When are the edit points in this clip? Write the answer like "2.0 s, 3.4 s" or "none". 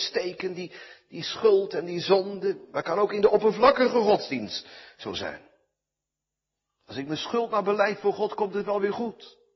none